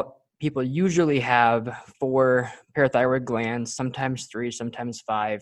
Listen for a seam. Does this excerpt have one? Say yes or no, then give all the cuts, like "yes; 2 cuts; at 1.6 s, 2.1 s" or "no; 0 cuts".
no; 0 cuts